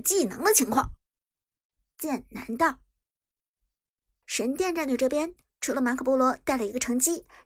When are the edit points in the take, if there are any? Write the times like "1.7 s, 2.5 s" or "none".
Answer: none